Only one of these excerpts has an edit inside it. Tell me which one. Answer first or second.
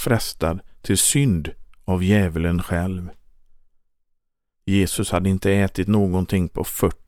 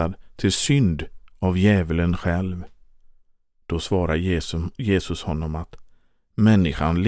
second